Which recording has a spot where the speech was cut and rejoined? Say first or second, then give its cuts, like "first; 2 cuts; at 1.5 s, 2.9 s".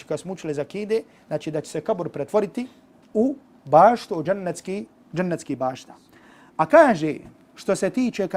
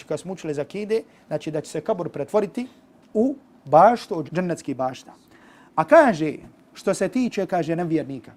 second; 1 cut; at 4.3 s